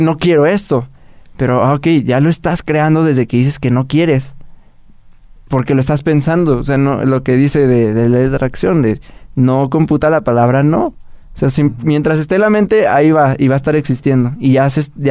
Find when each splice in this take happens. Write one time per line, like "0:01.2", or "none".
none